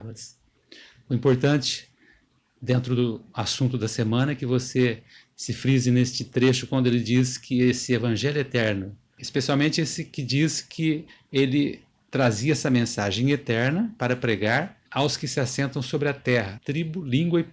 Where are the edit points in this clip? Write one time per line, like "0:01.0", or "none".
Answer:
0:14.9
0:16.6